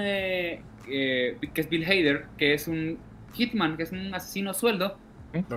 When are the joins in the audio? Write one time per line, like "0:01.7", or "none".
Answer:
none